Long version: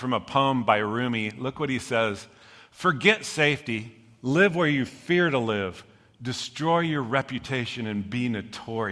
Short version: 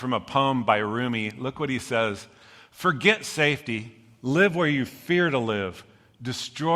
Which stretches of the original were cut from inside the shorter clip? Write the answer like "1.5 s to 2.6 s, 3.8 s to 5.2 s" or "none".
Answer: none